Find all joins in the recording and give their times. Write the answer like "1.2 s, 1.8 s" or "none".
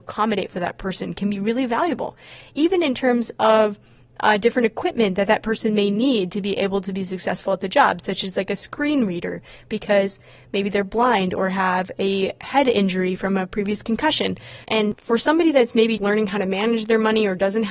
14.6 s, 16.0 s

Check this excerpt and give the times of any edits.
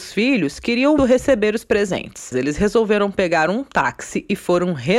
1.0 s, 2.3 s

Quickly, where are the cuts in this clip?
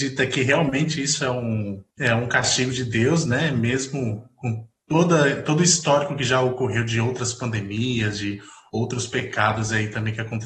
1.9 s

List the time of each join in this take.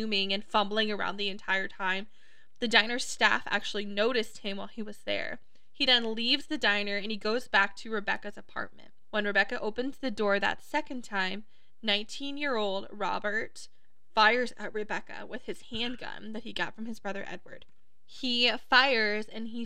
none

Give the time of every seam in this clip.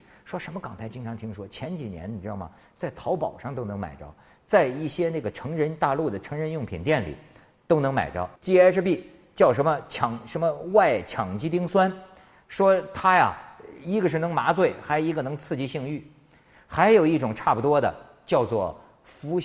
8.4 s

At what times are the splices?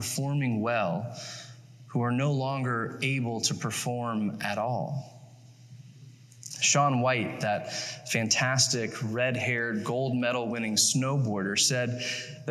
none

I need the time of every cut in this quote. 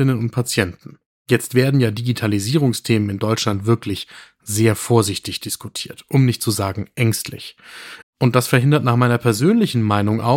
8.0 s

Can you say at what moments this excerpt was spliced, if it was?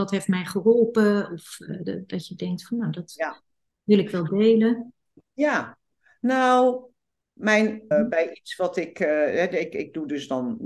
7.9 s

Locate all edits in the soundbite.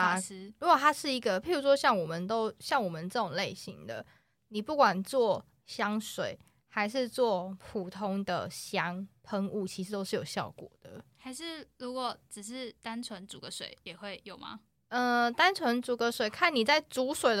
none

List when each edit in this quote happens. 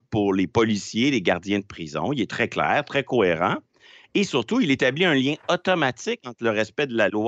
none

